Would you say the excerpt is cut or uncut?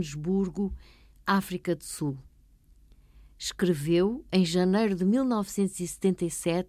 uncut